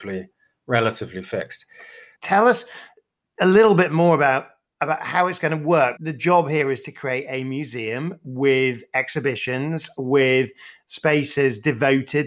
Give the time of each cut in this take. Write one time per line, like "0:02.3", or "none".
0:02.2
0:06.0